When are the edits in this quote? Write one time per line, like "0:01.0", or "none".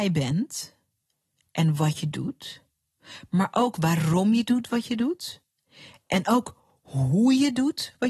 none